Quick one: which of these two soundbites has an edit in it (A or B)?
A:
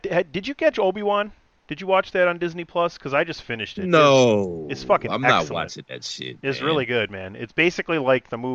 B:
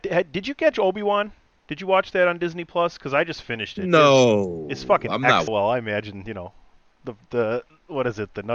B